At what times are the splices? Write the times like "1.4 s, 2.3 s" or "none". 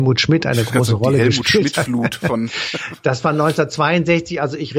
none